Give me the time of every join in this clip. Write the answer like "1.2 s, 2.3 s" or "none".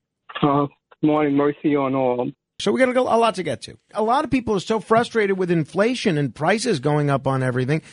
2.6 s, 3.9 s